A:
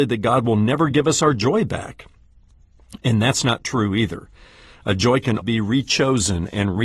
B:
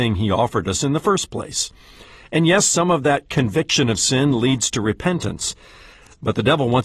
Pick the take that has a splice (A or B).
A